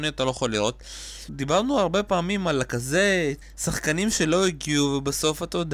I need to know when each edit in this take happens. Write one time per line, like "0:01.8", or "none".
0:01.3
0:03.4